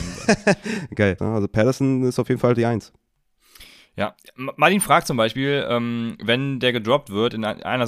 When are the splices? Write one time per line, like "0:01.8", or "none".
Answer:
0:01.2